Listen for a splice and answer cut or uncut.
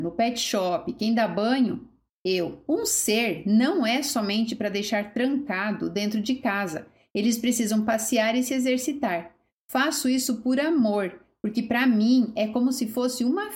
uncut